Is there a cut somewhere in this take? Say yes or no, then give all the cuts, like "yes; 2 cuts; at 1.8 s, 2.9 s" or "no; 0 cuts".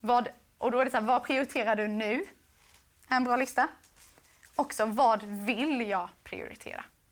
no; 0 cuts